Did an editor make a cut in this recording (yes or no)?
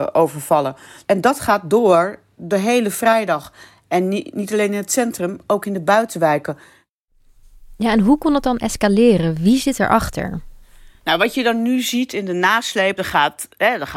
no